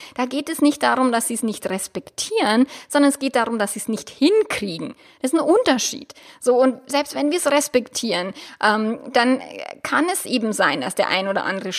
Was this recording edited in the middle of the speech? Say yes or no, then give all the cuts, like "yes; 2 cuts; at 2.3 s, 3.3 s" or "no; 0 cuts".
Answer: no; 0 cuts